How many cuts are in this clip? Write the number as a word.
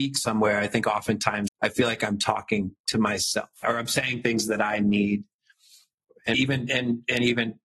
two